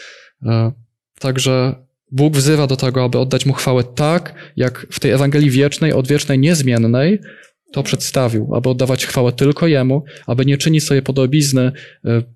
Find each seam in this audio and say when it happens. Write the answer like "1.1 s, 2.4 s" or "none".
none